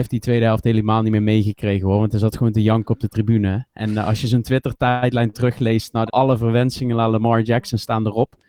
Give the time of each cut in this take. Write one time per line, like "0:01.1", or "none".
0:06.1